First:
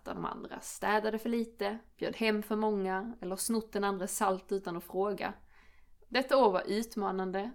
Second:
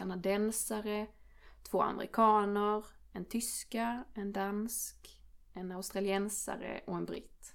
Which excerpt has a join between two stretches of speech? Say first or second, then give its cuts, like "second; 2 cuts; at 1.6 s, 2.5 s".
first; 1 cut; at 6.1 s